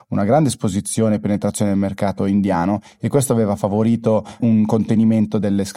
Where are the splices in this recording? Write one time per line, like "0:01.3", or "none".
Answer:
0:04.4